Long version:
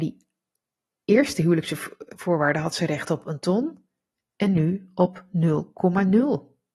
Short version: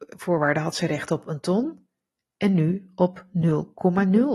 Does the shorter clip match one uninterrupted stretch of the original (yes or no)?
yes